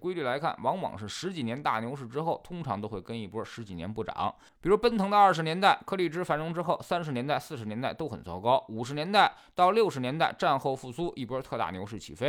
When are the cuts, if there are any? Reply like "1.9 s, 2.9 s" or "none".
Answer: none